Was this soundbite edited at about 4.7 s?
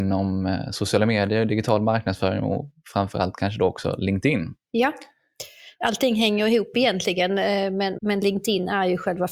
no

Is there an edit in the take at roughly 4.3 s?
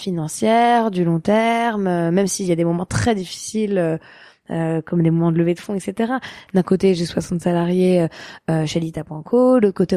no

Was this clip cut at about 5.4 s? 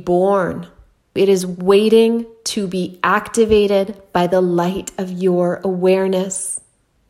no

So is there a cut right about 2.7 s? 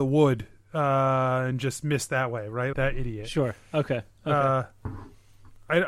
yes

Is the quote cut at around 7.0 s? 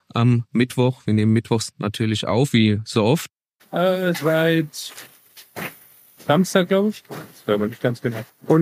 no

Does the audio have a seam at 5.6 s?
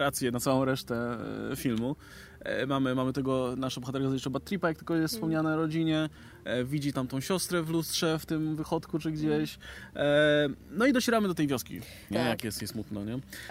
no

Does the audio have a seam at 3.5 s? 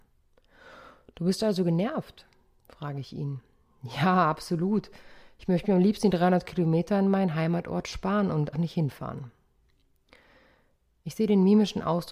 no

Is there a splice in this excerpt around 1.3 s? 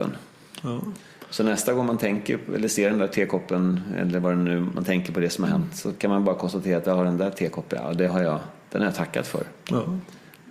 no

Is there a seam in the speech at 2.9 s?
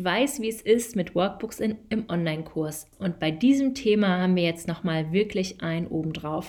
yes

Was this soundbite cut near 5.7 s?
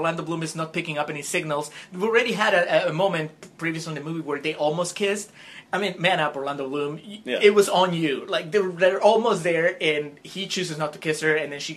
yes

